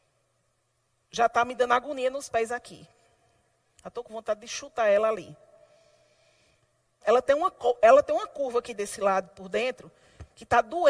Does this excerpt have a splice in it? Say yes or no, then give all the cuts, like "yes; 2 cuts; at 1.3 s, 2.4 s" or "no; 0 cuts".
yes; 1 cut; at 7.0 s